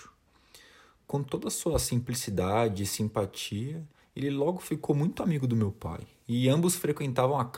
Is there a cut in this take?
no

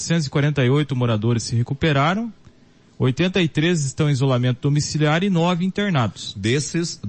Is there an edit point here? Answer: no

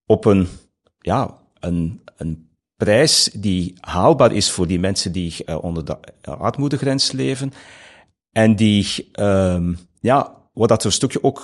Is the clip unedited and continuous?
yes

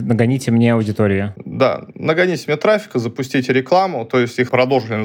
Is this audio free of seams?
yes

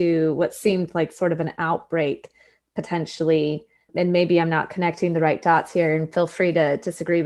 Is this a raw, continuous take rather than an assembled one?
yes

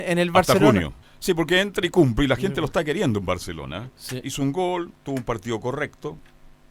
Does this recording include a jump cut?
yes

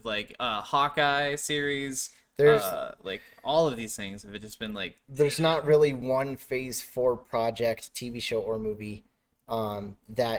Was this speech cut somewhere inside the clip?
no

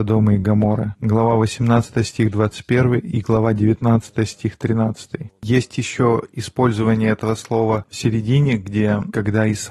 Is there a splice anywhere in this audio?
no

